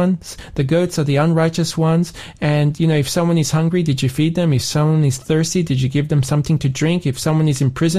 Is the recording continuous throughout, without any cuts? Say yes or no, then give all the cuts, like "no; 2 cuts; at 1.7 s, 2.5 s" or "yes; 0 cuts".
yes; 0 cuts